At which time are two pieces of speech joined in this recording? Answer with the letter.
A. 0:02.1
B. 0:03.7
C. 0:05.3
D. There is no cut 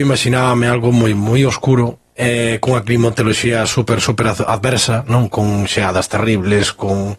A